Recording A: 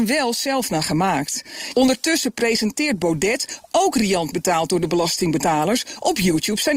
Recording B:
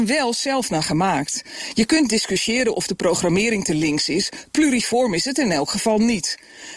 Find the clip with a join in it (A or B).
A